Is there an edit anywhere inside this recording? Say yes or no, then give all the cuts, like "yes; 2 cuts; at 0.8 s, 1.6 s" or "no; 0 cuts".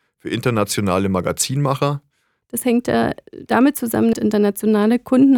yes; 2 cuts; at 2.4 s, 4.1 s